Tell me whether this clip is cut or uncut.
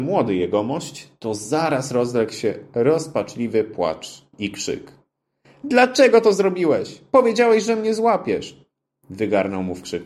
uncut